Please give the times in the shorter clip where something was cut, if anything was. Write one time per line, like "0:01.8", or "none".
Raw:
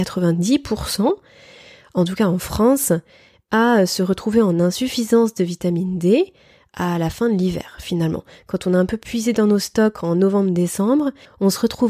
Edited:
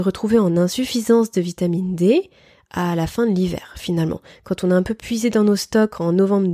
none